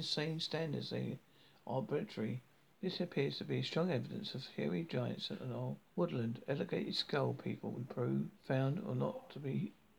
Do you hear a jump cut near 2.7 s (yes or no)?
yes